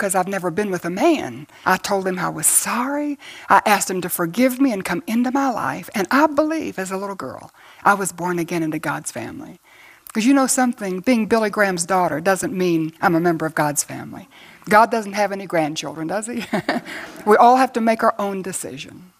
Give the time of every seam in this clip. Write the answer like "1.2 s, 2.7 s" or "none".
1.6 s